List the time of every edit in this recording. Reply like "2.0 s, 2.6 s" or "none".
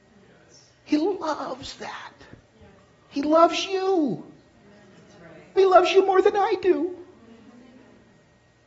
5.6 s